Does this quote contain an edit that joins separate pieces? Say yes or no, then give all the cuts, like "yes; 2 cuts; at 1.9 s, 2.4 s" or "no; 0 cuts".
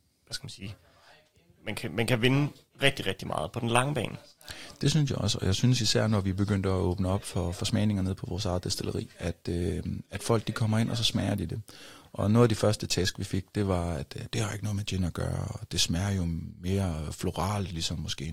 no; 0 cuts